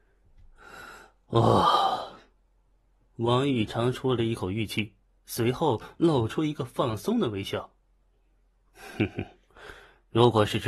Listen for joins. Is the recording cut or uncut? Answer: cut